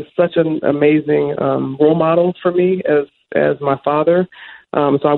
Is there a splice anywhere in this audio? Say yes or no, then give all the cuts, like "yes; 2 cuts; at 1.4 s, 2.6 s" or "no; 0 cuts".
no; 0 cuts